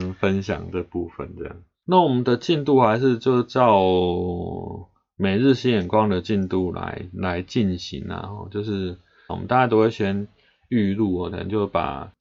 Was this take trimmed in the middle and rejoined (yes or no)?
yes